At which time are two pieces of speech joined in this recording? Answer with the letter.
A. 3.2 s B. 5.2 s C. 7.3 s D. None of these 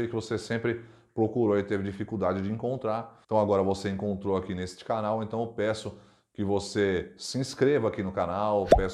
A